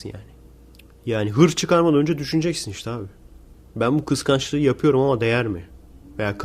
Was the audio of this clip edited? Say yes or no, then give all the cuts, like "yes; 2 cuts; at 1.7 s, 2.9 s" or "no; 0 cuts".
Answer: no; 0 cuts